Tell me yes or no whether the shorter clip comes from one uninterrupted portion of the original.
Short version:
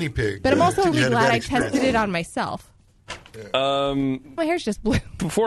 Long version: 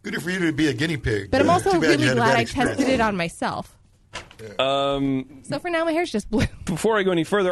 no